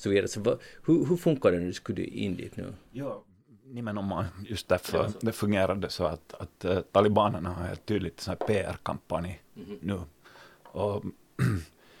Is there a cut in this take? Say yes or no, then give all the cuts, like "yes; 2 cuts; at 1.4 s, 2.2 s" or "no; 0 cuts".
no; 0 cuts